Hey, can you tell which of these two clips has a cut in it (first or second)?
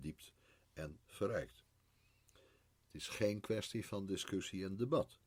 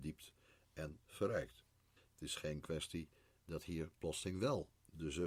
second